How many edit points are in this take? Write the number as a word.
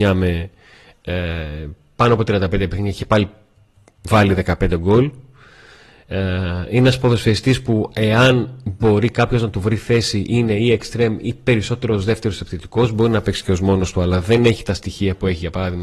zero